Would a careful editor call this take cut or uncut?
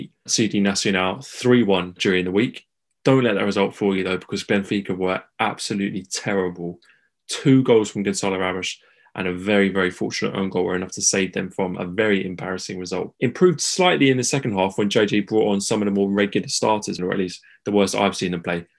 cut